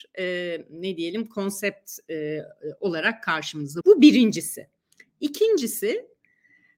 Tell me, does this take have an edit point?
yes; 1 cut; at 3.8 s

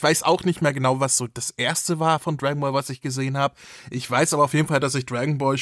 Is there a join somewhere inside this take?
no; 0 cuts

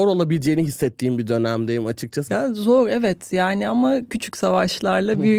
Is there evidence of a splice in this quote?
yes; 2 cuts; at 2.3 s, 4.1 s

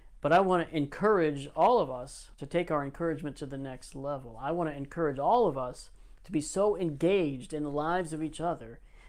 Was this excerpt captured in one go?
yes; 0 cuts

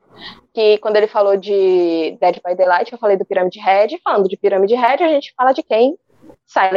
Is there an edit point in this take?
no; 0 cuts

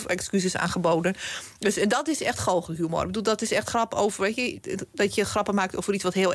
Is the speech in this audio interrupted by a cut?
no; 0 cuts

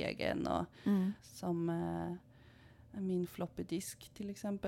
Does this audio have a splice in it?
yes; 1 cut; at 1.2 s

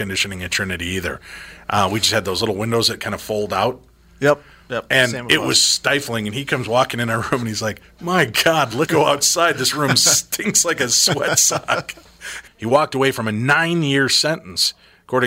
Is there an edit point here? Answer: yes; 2 cuts; at 8.9 s, 12.5 s

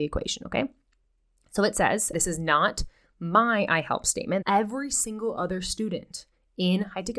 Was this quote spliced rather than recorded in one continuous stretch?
yes; 2 cuts; at 2.1 s, 4.4 s

